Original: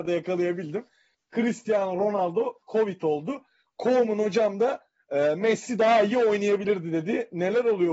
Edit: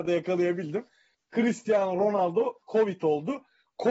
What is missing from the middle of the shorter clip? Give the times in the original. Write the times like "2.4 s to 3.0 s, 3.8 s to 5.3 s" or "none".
none